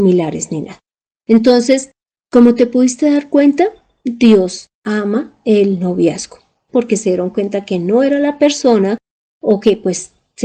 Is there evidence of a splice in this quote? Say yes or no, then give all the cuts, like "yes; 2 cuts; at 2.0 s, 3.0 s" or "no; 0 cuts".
yes; 2 cuts; at 6.7 s, 9.2 s